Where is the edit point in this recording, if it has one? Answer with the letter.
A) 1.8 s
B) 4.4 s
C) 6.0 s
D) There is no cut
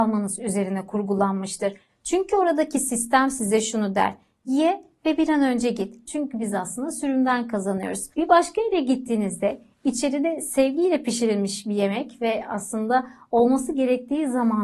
C